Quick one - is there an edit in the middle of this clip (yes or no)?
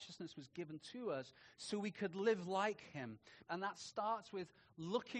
yes